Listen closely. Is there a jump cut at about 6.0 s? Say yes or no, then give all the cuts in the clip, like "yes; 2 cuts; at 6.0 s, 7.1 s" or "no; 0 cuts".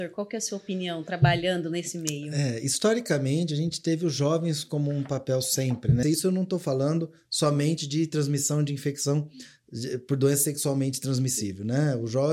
yes; 1 cut; at 6.0 s